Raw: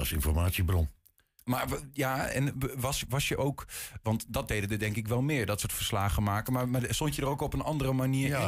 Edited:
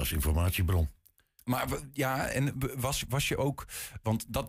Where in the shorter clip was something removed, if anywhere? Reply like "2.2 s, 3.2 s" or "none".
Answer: none

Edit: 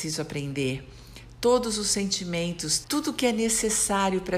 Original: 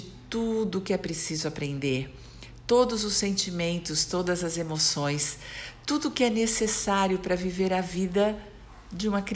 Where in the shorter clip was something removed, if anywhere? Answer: 2.8 s

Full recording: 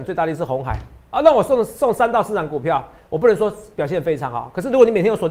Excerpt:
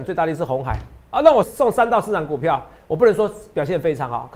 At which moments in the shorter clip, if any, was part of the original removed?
1.4 s

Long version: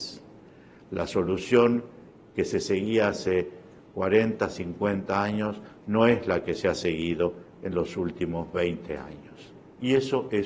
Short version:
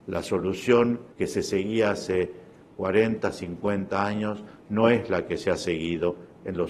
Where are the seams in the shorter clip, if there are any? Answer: 1.1 s

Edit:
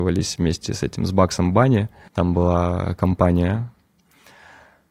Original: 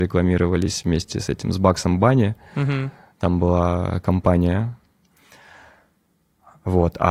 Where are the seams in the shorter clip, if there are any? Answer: 2.1 s

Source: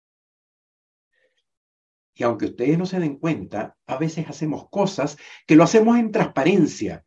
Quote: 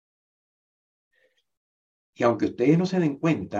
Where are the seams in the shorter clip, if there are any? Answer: none

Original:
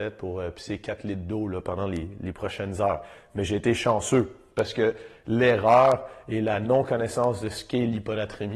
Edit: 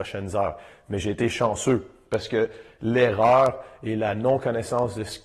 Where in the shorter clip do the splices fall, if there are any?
none

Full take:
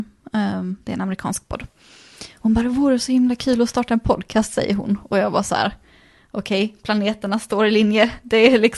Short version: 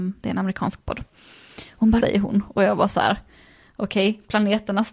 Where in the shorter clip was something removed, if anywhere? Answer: 2.0 s

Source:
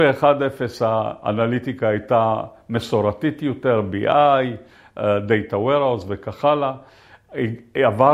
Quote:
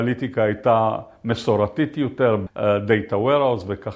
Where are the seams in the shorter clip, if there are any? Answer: 2.5 s

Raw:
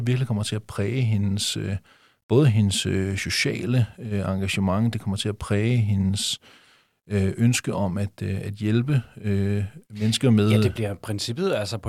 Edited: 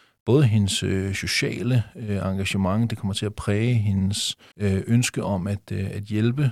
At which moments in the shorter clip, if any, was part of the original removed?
4.5 s

